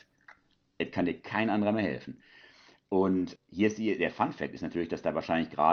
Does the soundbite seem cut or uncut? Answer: cut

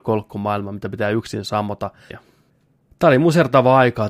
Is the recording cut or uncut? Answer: cut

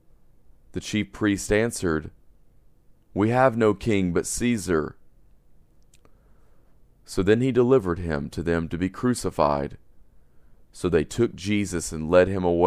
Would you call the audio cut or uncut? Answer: uncut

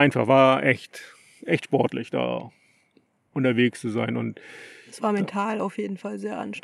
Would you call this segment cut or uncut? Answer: uncut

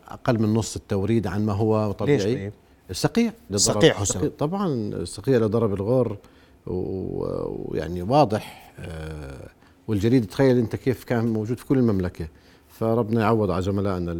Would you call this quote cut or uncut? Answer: cut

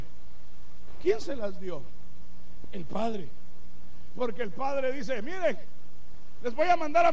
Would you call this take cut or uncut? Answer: cut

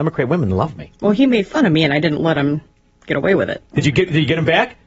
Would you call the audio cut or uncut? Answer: cut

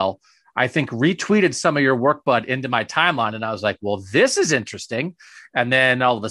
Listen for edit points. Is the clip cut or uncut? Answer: uncut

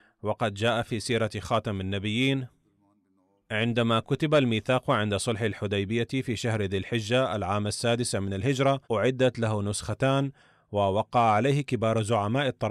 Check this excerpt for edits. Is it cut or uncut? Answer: cut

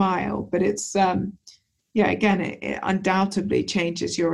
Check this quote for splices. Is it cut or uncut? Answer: uncut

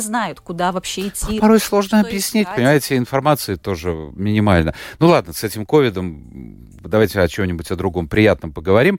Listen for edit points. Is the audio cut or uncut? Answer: uncut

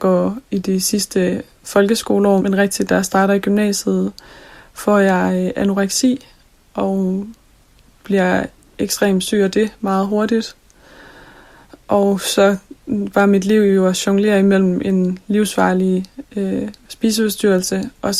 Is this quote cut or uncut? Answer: cut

